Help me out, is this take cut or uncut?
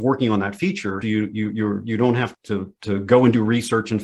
cut